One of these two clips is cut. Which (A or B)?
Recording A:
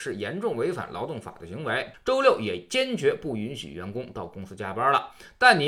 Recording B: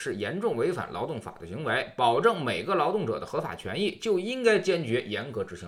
A